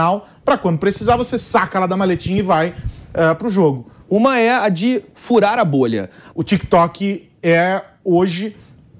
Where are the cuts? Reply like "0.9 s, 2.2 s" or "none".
4.0 s, 6.3 s